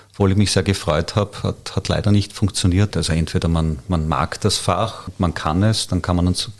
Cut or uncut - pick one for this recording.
cut